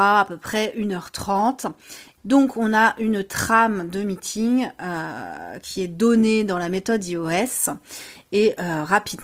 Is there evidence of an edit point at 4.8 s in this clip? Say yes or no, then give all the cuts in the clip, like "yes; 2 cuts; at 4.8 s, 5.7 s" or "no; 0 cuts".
no; 1 cut; at 2.2 s